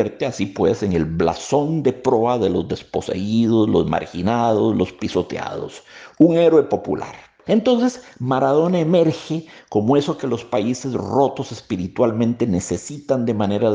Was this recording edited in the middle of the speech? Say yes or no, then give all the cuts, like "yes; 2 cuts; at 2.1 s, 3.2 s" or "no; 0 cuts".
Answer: yes; 1 cut; at 7.5 s